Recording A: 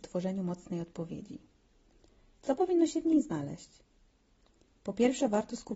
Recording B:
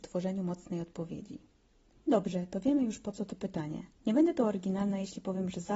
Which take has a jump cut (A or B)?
B